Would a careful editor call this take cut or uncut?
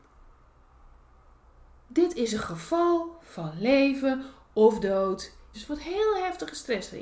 cut